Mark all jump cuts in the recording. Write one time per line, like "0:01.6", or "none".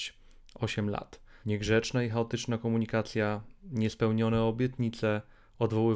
0:01.4